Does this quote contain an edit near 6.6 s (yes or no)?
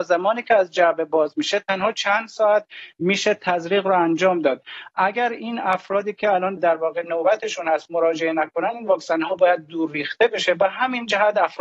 yes